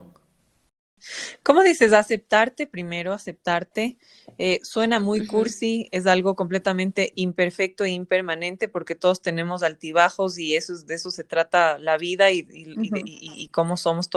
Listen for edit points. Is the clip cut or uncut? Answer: uncut